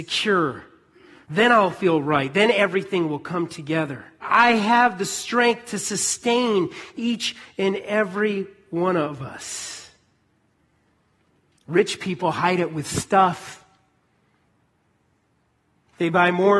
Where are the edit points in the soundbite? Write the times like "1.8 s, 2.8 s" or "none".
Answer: 1.2 s, 4.2 s, 11.6 s